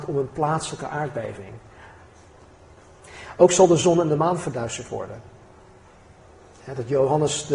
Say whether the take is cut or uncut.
uncut